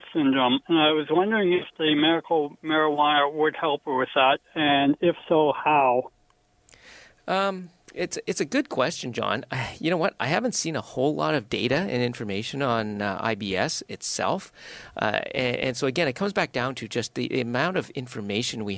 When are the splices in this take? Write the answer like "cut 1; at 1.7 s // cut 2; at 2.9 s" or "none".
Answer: none